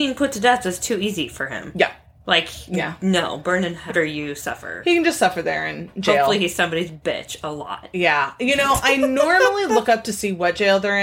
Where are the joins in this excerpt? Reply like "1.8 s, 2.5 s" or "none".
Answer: 3.9 s